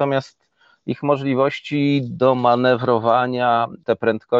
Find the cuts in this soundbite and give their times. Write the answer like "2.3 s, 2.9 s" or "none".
none